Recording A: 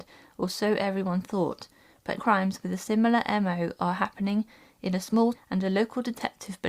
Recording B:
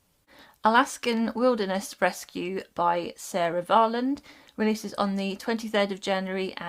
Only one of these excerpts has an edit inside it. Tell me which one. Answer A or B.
A